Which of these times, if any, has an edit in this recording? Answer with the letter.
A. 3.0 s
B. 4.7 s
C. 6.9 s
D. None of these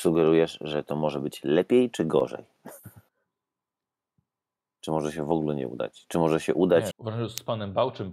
C